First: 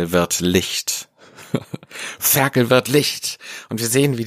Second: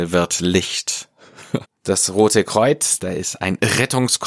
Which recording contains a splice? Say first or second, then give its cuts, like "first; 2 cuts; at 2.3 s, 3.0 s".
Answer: second; 2 cuts; at 1.6 s, 3.0 s